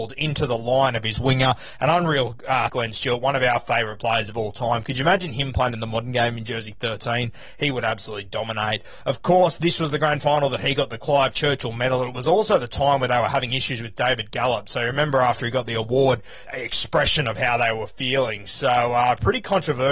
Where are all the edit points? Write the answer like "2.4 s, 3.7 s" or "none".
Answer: 2.7 s, 16.4 s